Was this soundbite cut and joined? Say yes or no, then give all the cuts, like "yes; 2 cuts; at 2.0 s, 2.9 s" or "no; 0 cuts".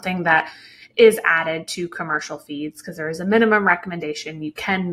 no; 0 cuts